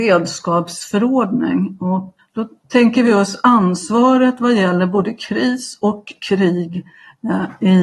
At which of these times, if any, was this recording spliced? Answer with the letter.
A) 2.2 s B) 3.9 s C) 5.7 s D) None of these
A